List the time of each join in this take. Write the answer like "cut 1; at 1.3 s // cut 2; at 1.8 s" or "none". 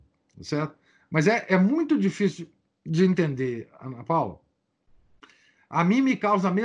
none